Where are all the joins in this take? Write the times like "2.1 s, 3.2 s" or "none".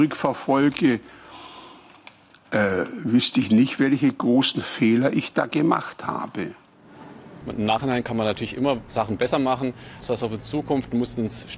7.4 s, 10.0 s